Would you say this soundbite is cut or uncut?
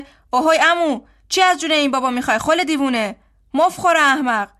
uncut